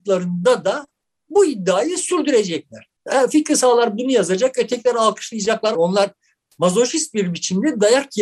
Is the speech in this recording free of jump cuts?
no; 1 cut; at 5.7 s

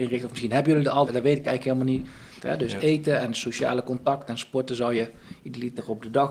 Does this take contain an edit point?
yes; 2 cuts; at 1.1 s, 2.4 s

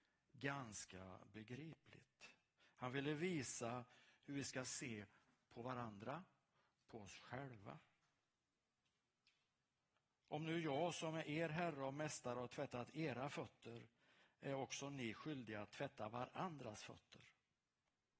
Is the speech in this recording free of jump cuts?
yes; 0 cuts

